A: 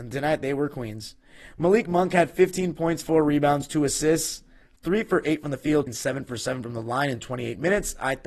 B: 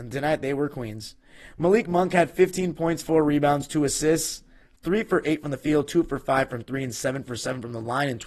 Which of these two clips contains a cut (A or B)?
A